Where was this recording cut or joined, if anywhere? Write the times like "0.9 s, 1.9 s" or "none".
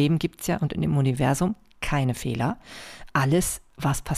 none